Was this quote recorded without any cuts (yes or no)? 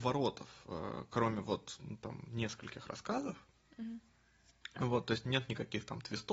yes